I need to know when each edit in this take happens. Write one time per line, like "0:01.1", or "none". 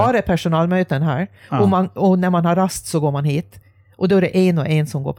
none